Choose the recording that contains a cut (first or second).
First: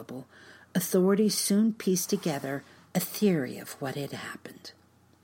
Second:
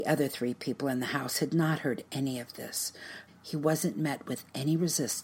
second